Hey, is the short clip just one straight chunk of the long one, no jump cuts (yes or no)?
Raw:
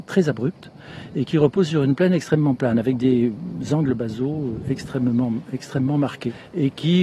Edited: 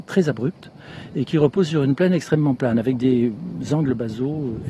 yes